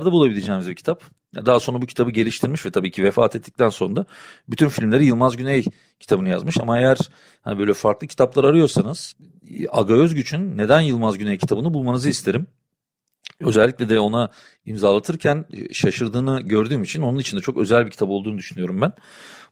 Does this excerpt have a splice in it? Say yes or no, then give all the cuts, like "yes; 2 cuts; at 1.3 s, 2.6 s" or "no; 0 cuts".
no; 0 cuts